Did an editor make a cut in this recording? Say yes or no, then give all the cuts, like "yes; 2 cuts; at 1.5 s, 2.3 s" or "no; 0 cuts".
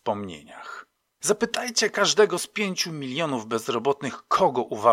yes; 1 cut; at 1.2 s